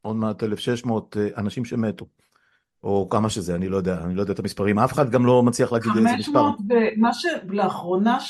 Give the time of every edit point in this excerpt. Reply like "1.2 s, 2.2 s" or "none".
none